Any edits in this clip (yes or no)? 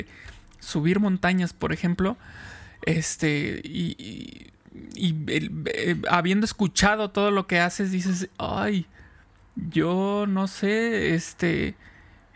no